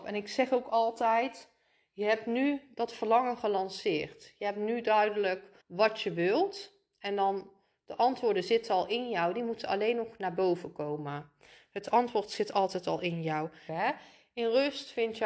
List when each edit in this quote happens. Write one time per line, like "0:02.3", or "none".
0:05.6
0:13.7